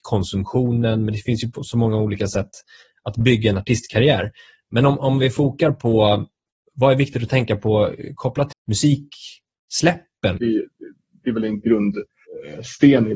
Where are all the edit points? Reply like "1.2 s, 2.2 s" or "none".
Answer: 8.5 s, 10.4 s